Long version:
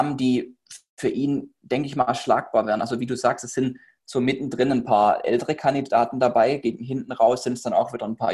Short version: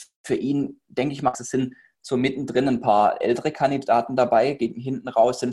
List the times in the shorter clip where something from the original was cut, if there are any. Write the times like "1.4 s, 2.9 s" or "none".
1.3 s